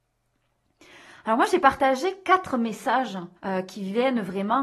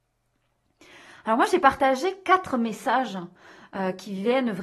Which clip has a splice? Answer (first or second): first